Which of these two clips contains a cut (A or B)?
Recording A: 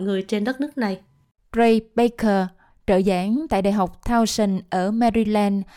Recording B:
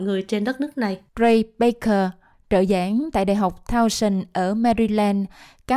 B